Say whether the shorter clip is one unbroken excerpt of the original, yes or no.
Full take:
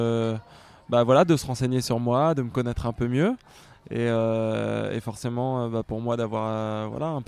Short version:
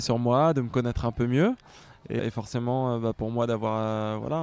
no